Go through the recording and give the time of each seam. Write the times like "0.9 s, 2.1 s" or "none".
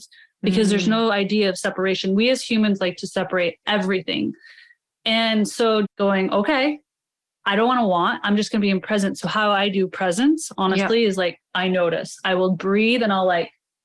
5.8 s